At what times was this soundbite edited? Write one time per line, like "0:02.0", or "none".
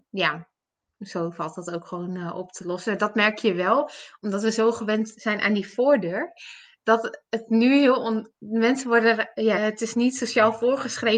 0:09.5